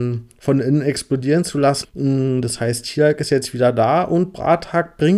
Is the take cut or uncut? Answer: cut